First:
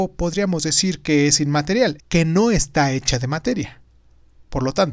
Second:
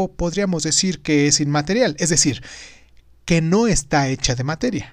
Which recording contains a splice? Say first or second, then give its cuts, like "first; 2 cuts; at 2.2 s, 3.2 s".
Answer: first; 1 cut; at 2.0 s